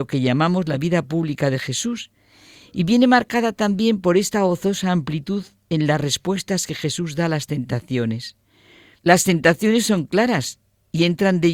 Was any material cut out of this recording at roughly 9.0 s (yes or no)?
yes